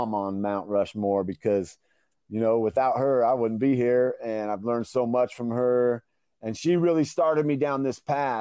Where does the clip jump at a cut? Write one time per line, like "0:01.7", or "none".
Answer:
none